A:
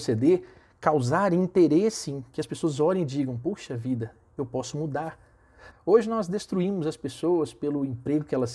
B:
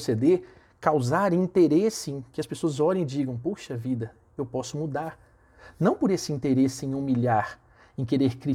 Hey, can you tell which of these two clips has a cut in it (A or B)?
A